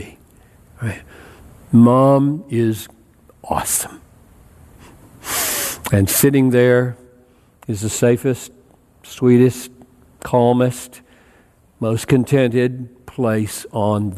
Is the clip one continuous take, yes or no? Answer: yes